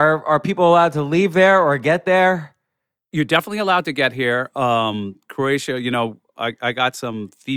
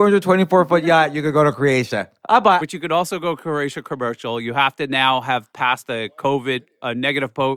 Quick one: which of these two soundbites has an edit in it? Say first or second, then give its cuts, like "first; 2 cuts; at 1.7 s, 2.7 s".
second; 1 cut; at 2.6 s